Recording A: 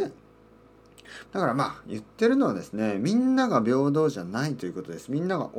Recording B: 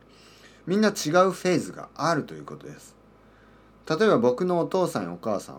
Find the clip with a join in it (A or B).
A